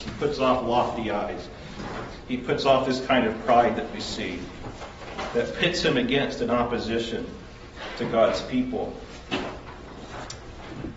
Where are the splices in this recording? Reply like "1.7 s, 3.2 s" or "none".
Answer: none